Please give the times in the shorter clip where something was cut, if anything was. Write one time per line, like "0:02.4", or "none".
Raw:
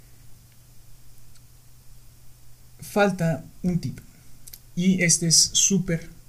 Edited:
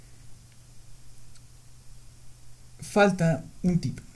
none